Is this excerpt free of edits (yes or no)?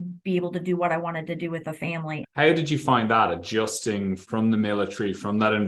no